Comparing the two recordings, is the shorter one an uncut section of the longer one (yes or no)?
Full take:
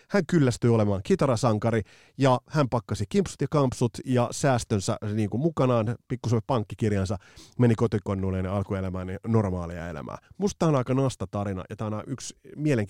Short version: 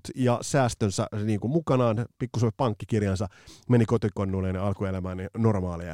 yes